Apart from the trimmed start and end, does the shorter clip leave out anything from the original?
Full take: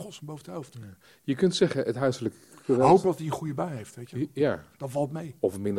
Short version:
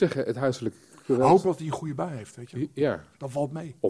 no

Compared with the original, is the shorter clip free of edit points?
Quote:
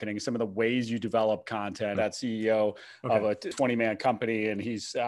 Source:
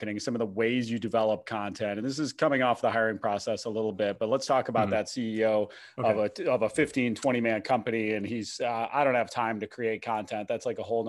no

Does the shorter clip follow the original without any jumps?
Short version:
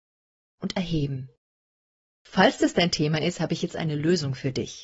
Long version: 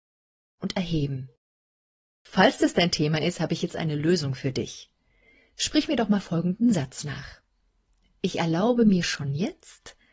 yes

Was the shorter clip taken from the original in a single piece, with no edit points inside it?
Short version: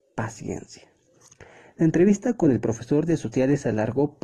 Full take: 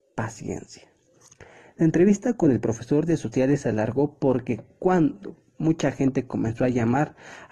yes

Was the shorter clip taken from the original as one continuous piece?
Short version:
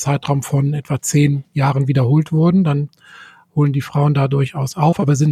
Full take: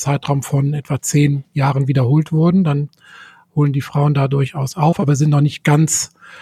yes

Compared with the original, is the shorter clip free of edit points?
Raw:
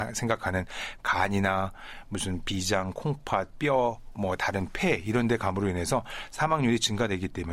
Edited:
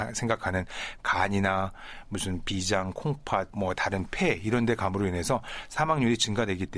no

